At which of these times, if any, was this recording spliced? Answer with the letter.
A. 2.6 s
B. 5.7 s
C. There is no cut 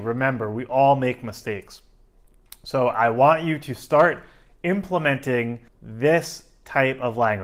B